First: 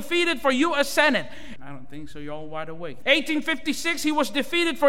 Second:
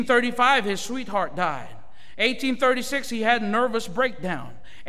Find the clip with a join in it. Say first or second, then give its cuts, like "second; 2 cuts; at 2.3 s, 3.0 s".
first; 2 cuts; at 1.6 s, 3.0 s